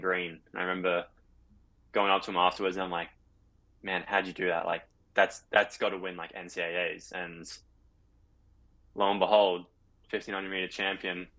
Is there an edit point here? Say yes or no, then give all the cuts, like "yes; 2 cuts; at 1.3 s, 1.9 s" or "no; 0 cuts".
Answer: no; 0 cuts